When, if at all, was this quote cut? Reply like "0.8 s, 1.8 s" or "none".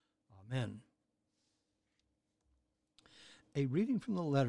none